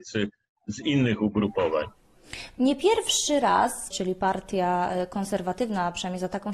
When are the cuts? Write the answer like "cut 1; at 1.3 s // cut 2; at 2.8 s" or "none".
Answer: cut 1; at 2.5 s // cut 2; at 3.9 s